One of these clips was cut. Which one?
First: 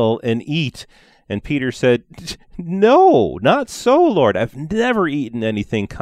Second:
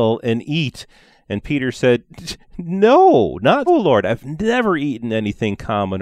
second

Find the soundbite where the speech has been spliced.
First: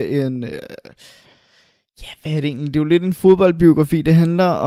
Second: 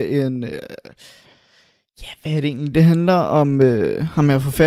second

